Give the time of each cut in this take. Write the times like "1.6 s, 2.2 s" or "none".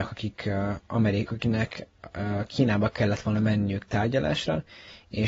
1.3 s